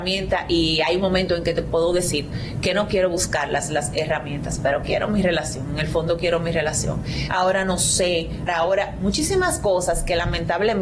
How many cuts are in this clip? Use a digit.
2